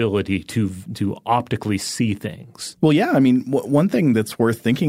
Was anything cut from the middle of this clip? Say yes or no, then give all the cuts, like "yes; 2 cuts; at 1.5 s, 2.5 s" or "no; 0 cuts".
no; 0 cuts